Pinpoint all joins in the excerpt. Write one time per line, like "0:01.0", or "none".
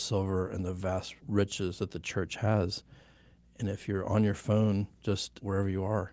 none